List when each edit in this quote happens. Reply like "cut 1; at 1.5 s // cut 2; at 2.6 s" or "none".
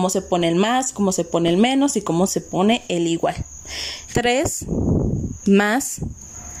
cut 1; at 4.1 s